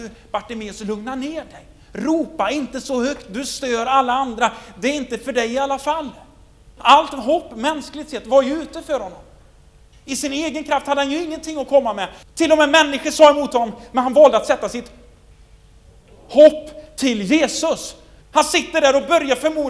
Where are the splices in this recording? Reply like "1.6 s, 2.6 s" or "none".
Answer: 6.8 s, 12.2 s, 18.2 s